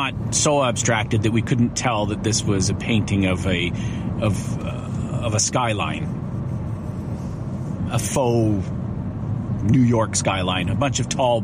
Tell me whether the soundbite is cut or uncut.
uncut